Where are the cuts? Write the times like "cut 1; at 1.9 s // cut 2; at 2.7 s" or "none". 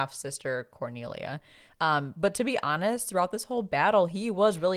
none

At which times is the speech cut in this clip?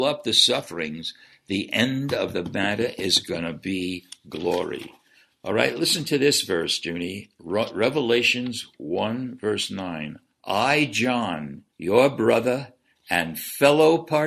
cut 1; at 11.7 s

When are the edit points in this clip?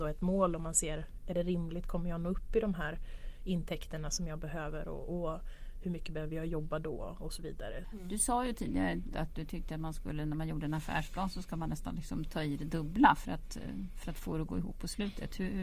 cut 1; at 7.8 s // cut 2; at 9.1 s

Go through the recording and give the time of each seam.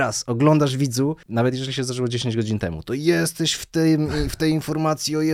cut 1; at 1.2 s

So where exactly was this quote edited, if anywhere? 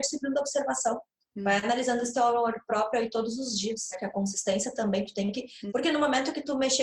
cut 1; at 3.9 s // cut 2; at 5.7 s

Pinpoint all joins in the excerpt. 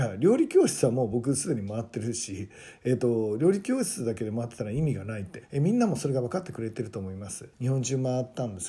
cut 1; at 5.4 s // cut 2; at 7.5 s

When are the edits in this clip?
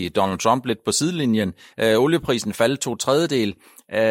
none

